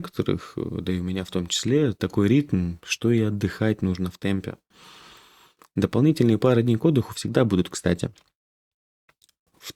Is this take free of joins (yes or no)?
yes